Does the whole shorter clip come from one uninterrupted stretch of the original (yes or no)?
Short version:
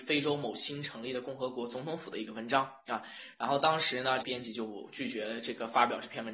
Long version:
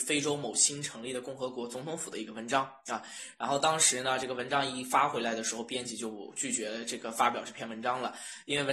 no